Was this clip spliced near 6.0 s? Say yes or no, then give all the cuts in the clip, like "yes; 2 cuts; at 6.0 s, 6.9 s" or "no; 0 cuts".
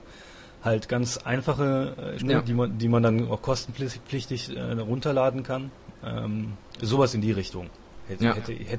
no; 1 cut; at 2.2 s